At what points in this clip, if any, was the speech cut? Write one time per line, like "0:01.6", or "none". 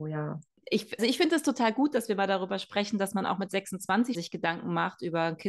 0:01.0
0:04.1